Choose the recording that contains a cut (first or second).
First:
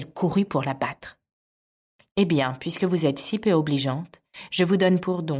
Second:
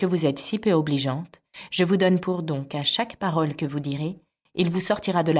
first